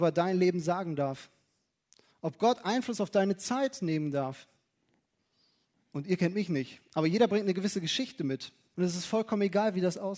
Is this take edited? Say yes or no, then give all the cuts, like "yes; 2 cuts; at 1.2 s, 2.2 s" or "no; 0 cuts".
yes; 2 cuts; at 5.7 s, 8.7 s